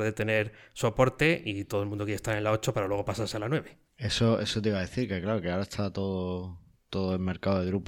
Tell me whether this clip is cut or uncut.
cut